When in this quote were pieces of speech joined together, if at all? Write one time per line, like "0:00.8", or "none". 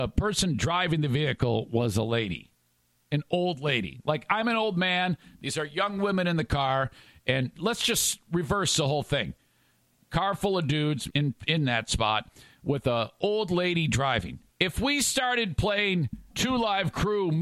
0:11.1
0:14.5
0:16.3